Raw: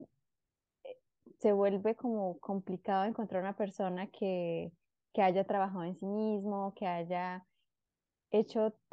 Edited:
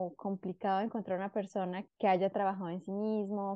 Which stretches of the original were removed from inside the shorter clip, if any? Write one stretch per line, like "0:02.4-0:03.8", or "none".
0:04.1-0:05.0